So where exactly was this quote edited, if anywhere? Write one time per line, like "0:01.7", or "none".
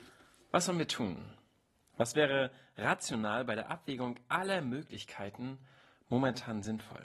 none

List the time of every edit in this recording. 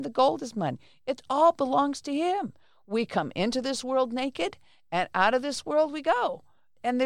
none

